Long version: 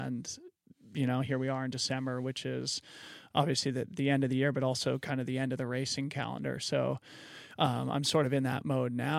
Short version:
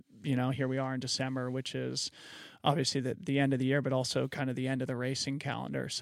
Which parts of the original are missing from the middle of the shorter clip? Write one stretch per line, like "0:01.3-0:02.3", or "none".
none